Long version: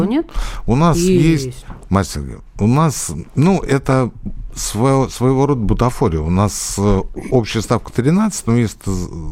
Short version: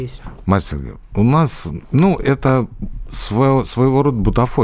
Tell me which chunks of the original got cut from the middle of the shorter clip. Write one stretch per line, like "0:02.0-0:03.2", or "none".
none